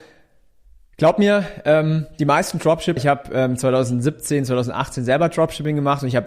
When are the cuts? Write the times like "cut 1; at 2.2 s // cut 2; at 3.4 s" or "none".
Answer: cut 1; at 3.0 s